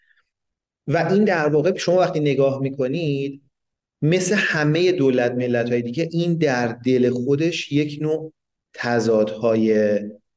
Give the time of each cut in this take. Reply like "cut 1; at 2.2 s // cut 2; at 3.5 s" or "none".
none